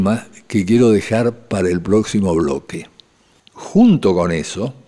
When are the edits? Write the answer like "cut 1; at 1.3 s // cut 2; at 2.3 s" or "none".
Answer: cut 1; at 3.4 s